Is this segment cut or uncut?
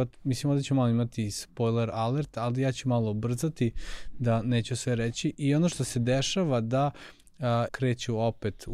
cut